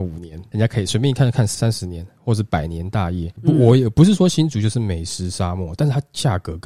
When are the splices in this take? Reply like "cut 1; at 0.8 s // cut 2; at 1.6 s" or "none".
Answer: cut 1; at 3.4 s // cut 2; at 5.8 s